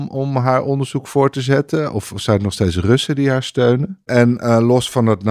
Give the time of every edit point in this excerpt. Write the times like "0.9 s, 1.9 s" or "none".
4.1 s